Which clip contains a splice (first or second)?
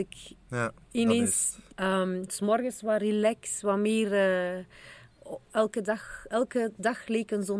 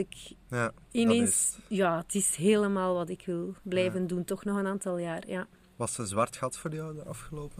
first